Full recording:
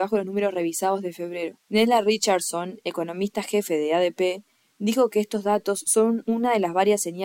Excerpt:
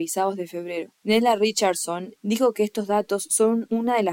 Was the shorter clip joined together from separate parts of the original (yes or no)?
yes